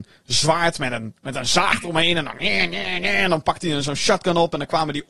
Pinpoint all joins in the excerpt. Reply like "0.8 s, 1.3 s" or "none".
none